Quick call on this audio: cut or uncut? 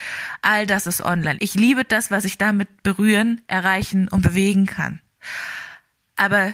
cut